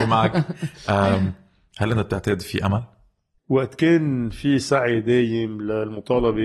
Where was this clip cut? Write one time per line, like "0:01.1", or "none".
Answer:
0:03.4